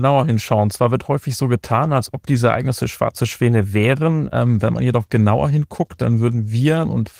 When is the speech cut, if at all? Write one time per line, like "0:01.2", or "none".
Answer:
none